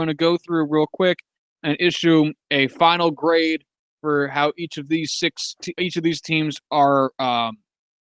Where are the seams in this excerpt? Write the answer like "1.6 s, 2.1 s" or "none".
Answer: 5.8 s

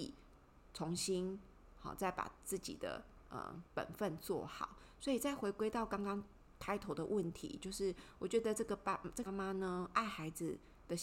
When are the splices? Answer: 3.7 s, 9.2 s

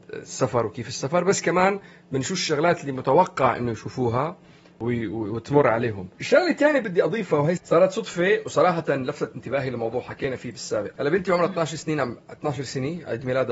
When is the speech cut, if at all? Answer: 6.1 s, 7.6 s, 11.0 s

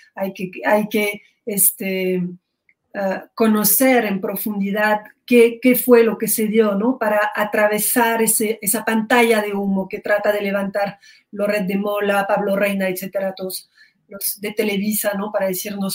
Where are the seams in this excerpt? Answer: none

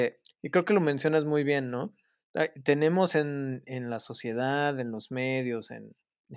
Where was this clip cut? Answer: none

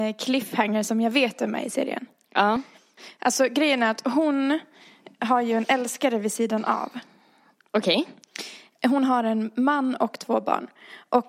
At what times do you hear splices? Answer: none

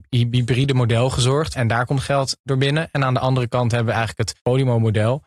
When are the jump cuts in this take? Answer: 1.5 s

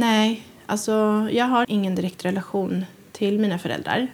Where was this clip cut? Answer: 1.6 s

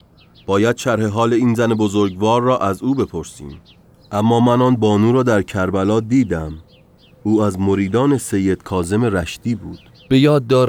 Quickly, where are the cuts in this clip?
none

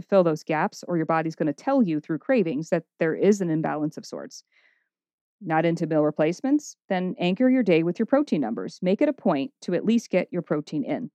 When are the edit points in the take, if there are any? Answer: none

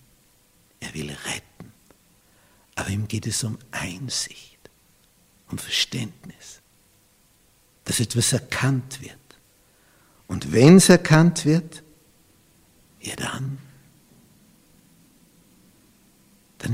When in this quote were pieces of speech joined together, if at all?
none

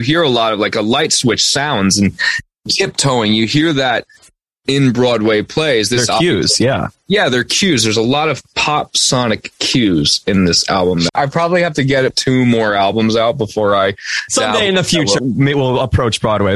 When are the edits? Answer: 11.1 s, 15.2 s

